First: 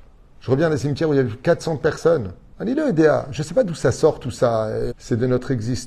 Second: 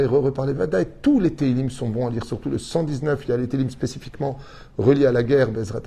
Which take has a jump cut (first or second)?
first